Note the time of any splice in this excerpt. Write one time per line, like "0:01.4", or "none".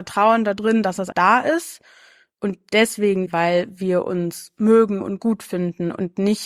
0:01.1
0:03.3